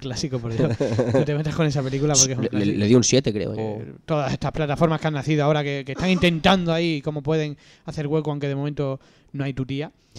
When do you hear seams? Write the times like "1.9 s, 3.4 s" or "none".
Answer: 3.6 s